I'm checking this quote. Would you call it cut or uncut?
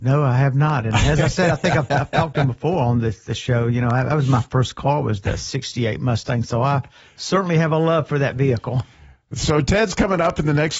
uncut